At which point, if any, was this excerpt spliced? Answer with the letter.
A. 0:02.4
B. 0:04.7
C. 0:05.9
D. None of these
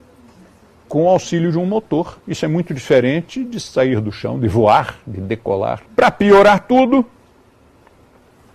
C